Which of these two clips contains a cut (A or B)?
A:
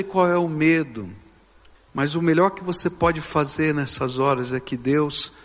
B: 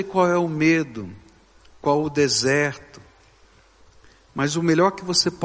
A